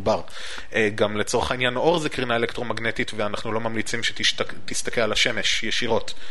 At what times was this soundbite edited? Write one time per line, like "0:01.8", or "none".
none